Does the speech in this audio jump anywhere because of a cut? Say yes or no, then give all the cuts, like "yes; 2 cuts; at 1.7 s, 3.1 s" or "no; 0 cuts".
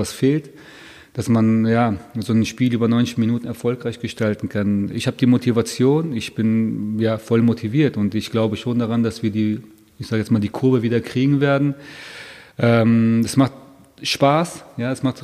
no; 0 cuts